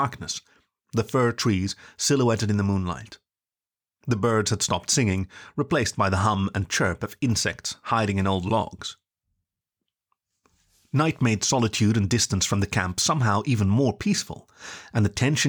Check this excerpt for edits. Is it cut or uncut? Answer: uncut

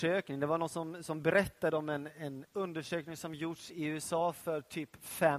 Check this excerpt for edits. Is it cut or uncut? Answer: uncut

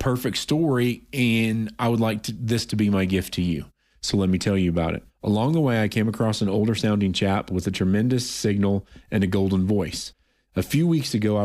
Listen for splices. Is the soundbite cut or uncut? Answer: cut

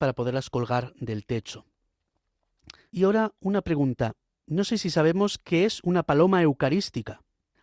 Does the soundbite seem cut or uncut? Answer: cut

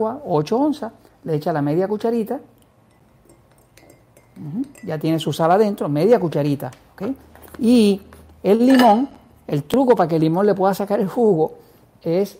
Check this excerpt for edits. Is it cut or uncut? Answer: cut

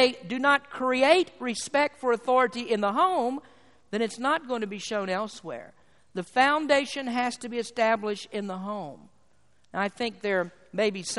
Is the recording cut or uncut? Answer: uncut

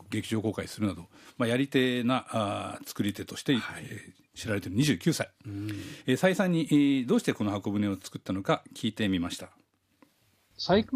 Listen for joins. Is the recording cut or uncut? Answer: uncut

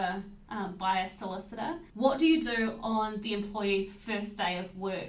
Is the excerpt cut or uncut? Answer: cut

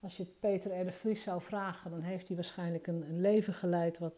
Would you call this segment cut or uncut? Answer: uncut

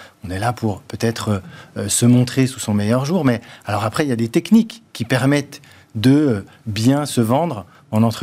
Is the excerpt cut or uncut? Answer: uncut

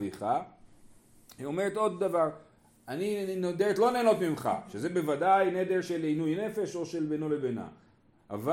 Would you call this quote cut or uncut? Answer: uncut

